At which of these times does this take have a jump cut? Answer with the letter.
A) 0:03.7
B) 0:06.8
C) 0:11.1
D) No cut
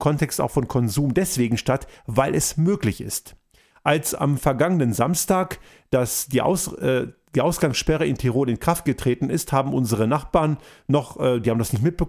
A